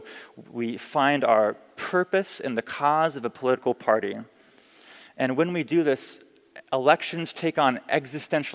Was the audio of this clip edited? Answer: no; 0 cuts

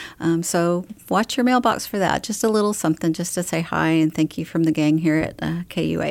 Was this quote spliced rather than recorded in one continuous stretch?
no; 0 cuts

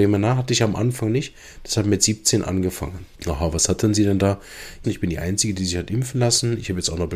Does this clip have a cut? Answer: yes; 2 cuts; at 3.2 s, 4.8 s

